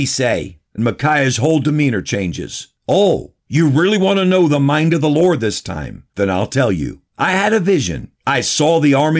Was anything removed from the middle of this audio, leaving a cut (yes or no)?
no